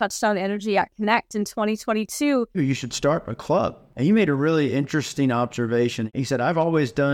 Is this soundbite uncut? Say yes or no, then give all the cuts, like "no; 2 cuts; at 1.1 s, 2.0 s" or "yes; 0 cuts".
no; 1 cut; at 2.5 s